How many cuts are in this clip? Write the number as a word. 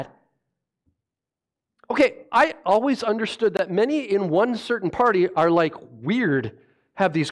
zero